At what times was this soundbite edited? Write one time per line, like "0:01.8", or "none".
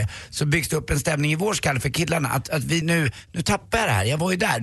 0:02.8

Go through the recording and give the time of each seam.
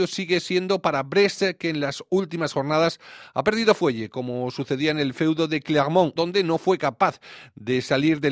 0:06.2

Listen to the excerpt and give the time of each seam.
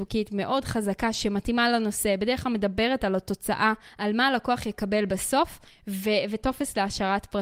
none

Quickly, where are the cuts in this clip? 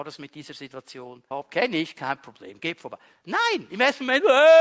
0:01.3

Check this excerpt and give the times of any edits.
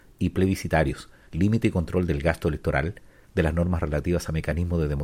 0:01.3
0:03.2

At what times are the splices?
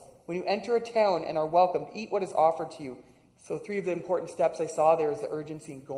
0:03.3

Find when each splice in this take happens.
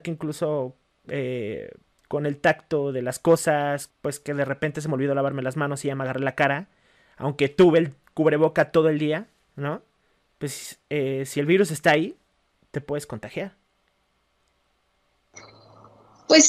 0:03.9

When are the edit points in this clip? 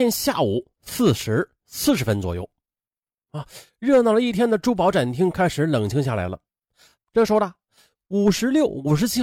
0:07.0

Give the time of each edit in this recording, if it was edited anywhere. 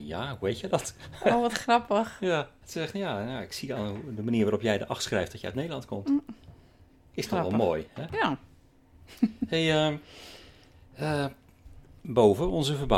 none

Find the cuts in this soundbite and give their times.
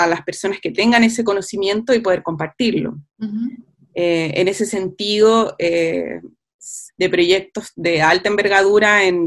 0:03.1
0:06.9

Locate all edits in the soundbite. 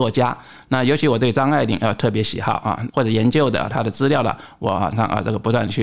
0:02.9
0:04.9

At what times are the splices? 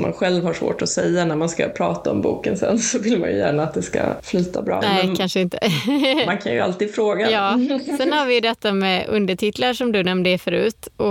0:04.8

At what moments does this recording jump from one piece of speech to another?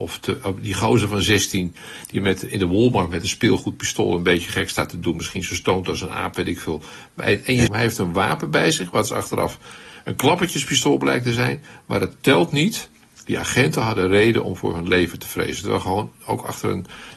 0:07.7

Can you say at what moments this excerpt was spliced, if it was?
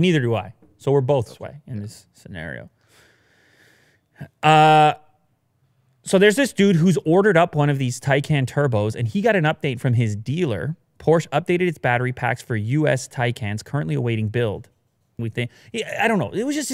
0:15.2

